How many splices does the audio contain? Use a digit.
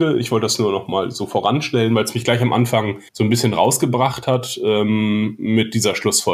1